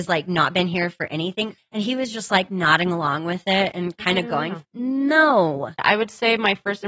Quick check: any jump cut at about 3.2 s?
no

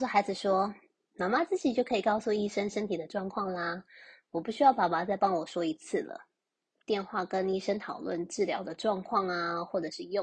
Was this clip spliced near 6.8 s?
yes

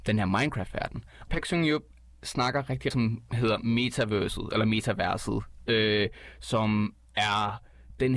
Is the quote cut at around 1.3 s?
yes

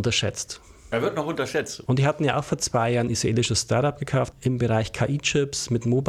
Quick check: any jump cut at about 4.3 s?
yes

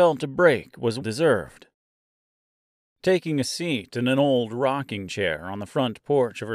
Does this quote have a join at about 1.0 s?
yes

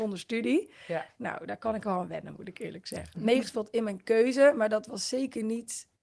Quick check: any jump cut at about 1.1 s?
no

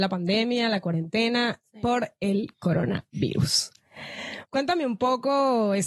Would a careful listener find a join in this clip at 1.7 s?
no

